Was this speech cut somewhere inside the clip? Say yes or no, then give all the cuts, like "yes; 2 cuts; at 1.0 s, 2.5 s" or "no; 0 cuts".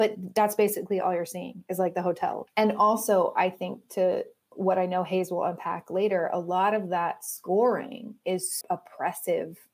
yes; 2 cuts; at 2.5 s, 8.6 s